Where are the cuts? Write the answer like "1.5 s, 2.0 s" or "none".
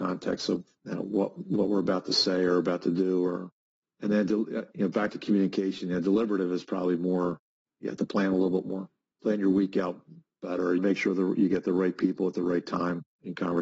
10.8 s